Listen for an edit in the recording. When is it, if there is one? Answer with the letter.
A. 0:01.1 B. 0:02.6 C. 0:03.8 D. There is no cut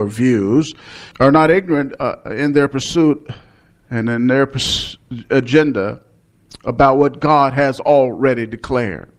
A